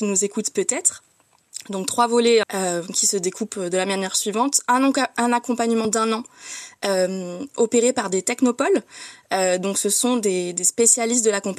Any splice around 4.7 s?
no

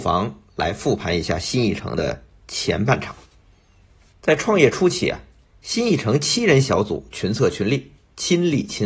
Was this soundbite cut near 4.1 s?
yes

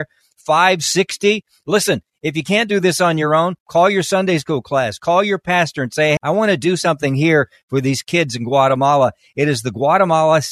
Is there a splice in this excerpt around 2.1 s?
no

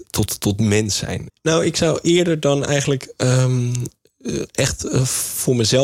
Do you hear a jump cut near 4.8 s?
no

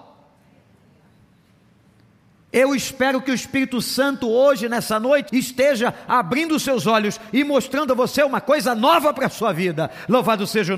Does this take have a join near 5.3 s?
yes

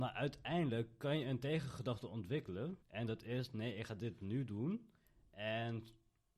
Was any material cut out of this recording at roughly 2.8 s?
yes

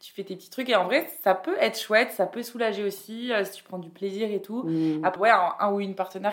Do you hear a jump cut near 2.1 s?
no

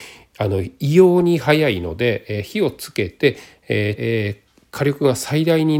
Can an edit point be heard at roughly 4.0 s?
yes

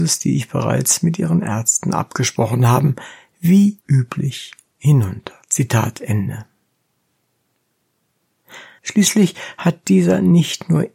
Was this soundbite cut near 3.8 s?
yes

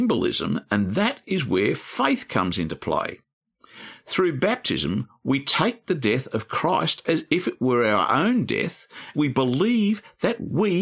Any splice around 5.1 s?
no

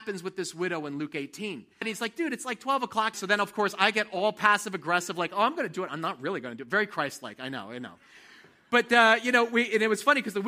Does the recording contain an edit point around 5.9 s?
no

